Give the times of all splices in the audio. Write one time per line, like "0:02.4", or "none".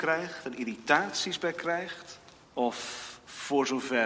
0:02.4